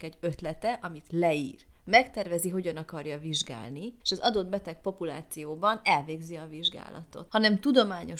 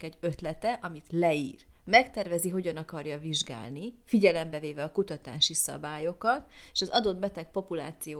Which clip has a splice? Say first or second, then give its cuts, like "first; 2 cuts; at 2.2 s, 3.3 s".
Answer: first; 2 cuts; at 4.0 s, 7.3 s